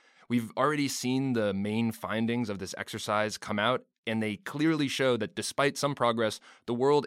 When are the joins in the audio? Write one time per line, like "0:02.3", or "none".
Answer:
none